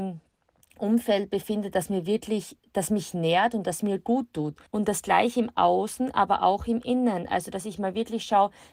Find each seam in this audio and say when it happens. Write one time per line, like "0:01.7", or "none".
0:04.7